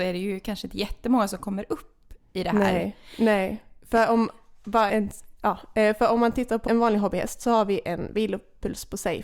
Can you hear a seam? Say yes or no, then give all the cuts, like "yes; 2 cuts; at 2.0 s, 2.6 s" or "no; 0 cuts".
yes; 2 cuts; at 4.9 s, 6.7 s